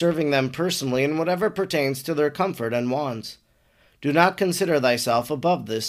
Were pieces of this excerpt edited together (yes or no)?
no